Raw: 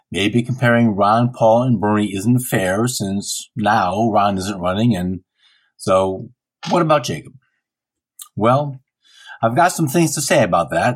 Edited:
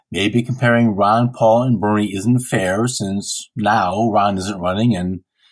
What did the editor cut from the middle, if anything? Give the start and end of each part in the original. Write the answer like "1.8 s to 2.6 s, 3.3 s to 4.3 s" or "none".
none